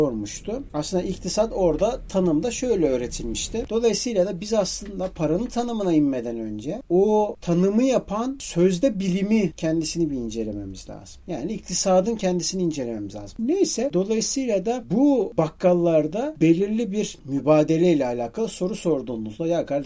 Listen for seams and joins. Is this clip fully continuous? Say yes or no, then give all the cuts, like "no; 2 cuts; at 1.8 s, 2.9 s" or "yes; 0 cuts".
no; 2 cuts; at 3.7 s, 13.4 s